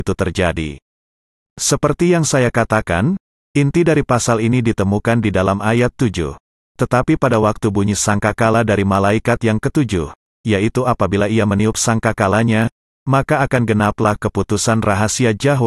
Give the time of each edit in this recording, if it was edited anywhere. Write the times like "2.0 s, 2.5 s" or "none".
none